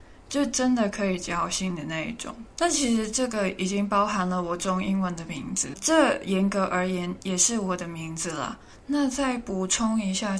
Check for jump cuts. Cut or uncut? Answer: cut